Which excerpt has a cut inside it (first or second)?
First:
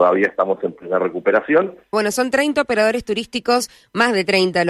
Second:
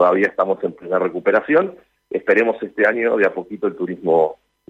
first